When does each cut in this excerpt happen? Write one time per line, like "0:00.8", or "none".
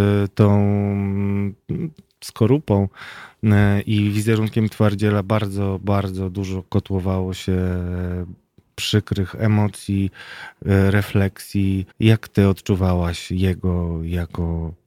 0:11.9

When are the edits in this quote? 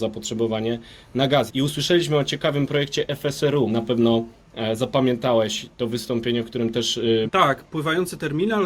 0:01.5
0:03.7
0:07.3

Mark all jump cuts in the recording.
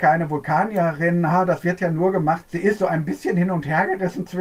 0:02.4

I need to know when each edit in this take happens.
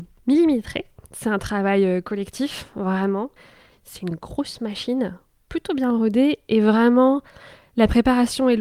none

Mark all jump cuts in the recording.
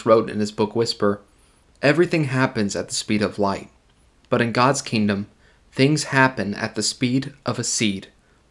none

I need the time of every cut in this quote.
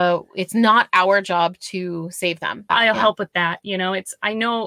0:02.7

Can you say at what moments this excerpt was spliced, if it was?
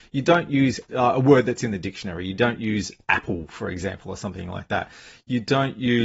none

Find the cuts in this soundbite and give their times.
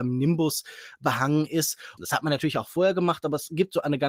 0:02.0

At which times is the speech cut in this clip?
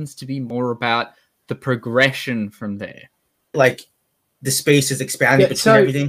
0:03.5

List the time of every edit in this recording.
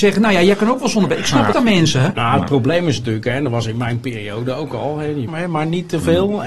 0:01.5
0:05.3

